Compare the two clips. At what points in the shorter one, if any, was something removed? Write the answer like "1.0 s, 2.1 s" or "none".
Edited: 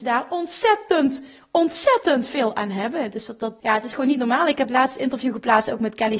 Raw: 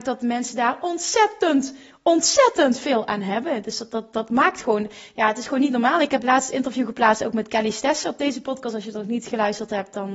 3.6 s